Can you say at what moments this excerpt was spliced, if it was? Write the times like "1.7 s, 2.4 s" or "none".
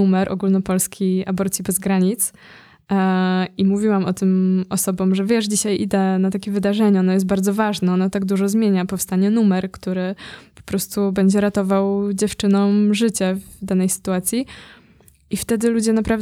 none